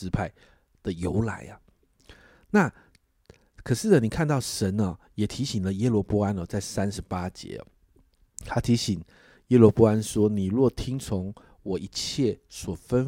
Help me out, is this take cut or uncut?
uncut